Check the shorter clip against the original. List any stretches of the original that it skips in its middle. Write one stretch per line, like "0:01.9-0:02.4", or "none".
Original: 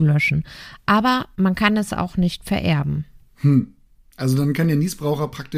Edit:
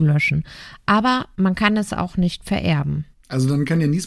0:03.1-0:04.0